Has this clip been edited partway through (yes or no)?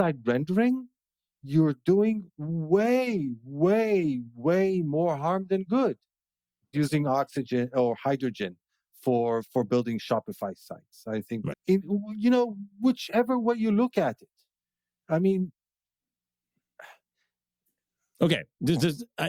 yes